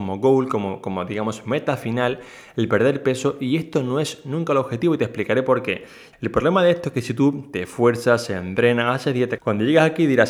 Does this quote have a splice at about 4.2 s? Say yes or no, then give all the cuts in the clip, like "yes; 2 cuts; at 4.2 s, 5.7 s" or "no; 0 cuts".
no; 2 cuts; at 6.1 s, 9.4 s